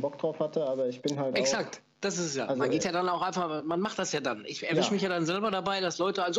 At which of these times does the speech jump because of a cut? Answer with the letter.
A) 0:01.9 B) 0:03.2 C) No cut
A